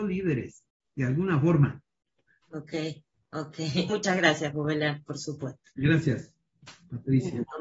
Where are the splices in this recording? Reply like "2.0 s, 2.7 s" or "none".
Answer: 3.9 s

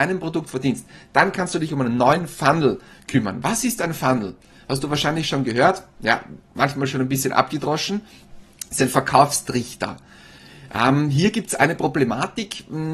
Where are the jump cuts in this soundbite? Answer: none

